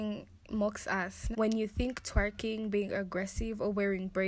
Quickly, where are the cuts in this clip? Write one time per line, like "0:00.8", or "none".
0:01.3